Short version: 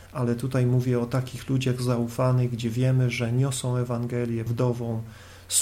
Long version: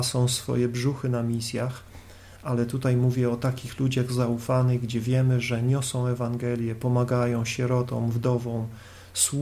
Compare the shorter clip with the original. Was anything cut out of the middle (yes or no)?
yes